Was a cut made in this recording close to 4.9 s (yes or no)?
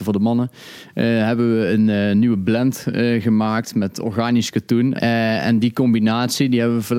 yes